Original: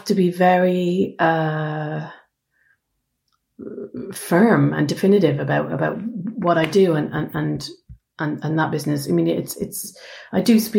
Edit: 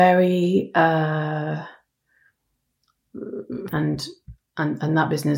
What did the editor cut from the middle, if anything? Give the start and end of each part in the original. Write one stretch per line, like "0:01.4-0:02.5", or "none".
0:04.1-0:07.3